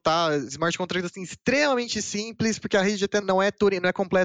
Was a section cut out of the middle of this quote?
yes; 1 cut; at 3.2 s

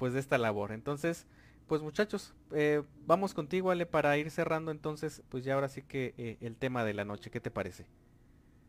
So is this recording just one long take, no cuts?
no; 1 cut; at 5.2 s

